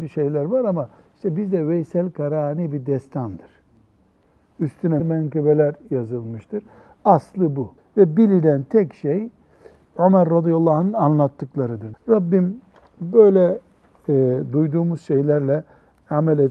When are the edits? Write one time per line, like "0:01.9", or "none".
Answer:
0:05.0
0:07.8
0:11.9